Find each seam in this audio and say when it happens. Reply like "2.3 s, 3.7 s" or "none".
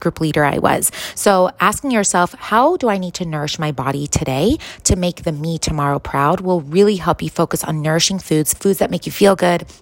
1.1 s, 8.6 s